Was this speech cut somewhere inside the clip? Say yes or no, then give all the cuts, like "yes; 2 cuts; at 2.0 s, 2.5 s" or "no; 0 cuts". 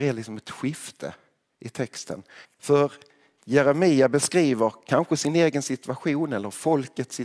yes; 1 cut; at 2.4 s